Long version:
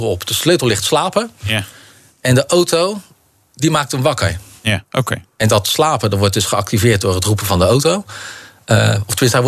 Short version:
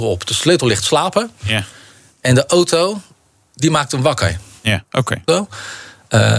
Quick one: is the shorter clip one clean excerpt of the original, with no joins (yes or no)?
no